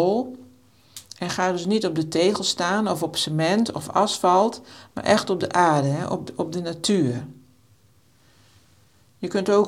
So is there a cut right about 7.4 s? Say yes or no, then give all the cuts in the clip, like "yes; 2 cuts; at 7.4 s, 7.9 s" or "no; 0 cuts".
no; 0 cuts